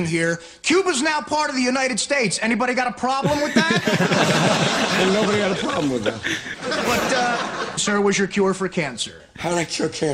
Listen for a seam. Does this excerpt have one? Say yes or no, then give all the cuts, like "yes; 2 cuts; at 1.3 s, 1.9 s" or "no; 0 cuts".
yes; 2 cuts; at 6.5 s, 7.8 s